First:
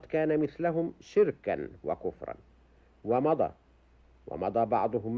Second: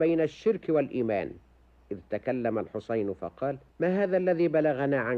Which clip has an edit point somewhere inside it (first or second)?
second